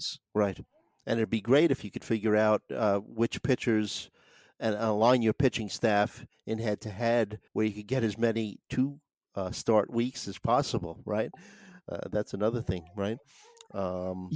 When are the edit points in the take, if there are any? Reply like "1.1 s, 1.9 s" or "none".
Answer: 7.5 s

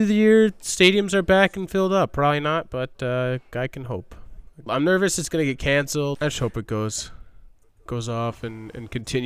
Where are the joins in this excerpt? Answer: 4.7 s, 6.1 s

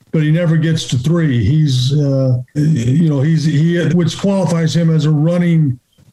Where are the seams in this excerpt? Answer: 2.5 s, 3.9 s

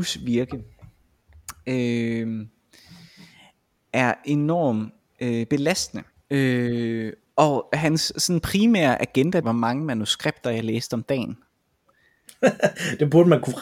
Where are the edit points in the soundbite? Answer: 6.2 s, 9.4 s

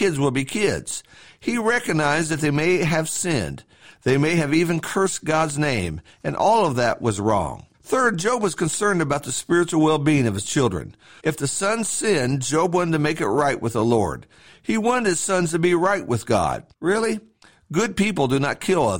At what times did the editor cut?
7.7 s, 11.2 s, 16.7 s

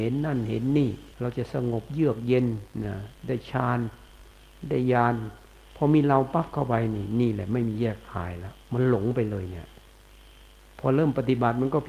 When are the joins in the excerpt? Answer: 1.1 s, 8.6 s

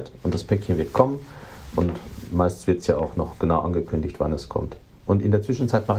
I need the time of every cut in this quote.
none

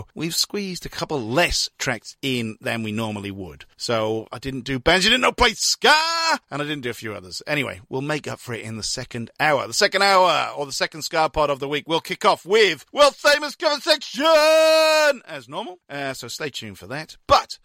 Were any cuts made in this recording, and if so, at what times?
none

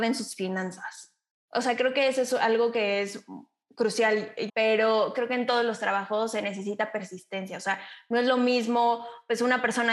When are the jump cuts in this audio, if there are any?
4.5 s

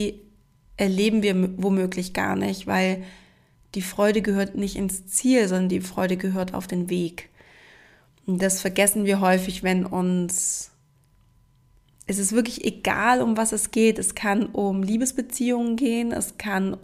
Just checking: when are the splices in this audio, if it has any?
none

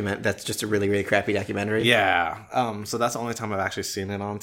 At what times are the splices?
none

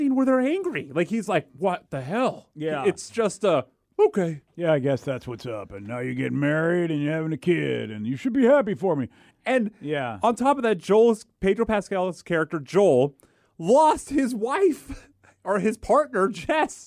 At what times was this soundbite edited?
9.3 s

